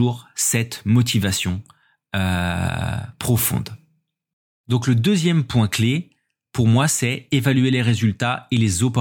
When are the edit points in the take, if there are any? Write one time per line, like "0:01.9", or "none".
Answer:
none